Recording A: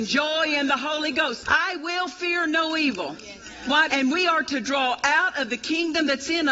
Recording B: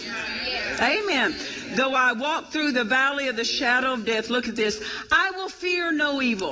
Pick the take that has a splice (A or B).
A